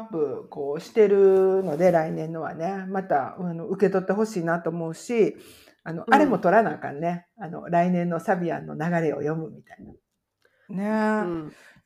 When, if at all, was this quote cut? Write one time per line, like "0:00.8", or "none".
0:10.7